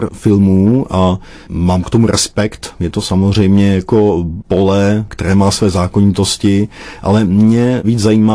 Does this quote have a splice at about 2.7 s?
no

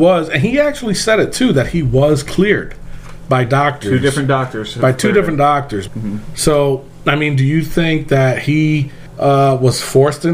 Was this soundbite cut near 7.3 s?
no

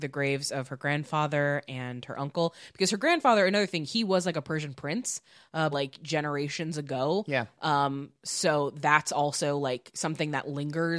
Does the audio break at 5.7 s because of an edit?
yes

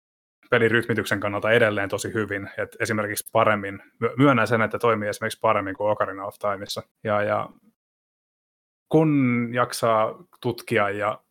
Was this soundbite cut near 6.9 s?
yes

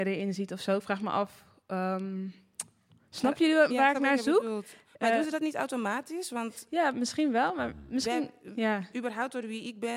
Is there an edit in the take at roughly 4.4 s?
no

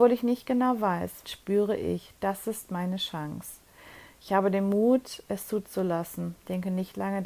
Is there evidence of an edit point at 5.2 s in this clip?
no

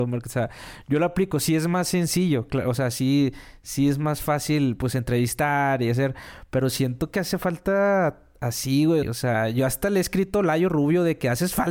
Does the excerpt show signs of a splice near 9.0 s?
yes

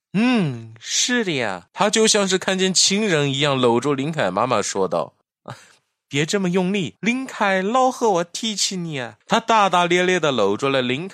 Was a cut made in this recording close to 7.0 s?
yes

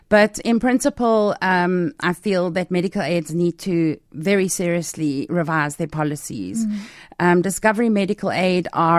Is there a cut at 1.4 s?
no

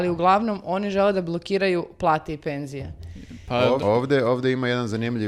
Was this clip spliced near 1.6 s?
no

